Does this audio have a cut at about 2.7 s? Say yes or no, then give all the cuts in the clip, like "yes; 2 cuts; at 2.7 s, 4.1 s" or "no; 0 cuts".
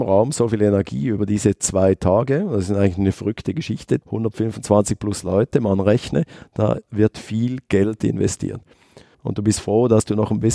no; 2 cuts; at 4.0 s, 9.1 s